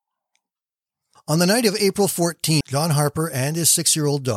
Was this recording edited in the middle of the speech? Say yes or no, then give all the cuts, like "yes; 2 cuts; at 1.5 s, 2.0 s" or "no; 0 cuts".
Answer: yes; 1 cut; at 2.6 s